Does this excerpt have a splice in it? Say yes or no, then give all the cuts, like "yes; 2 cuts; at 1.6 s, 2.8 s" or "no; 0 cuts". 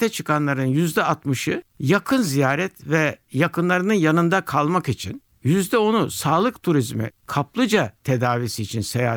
yes; 1 cut; at 5.3 s